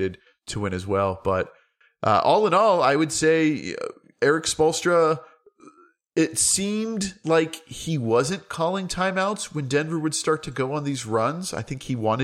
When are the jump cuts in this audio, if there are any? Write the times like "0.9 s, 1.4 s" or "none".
none